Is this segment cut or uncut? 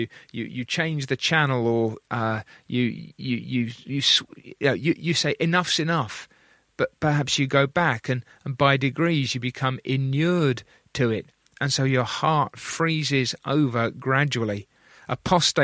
uncut